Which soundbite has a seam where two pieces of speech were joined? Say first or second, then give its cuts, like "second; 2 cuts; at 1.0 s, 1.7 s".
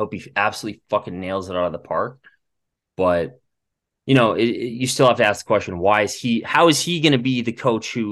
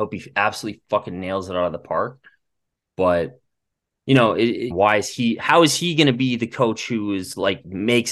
second; 1 cut; at 4.7 s